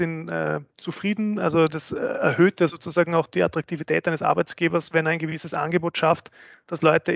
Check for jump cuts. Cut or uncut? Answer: uncut